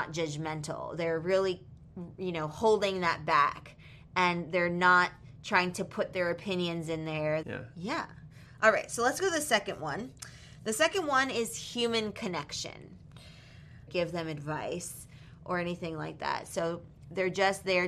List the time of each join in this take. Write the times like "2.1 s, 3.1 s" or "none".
7.4 s, 13.9 s